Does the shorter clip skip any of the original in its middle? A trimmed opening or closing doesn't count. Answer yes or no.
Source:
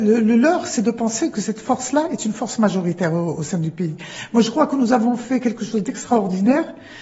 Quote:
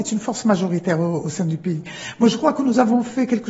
no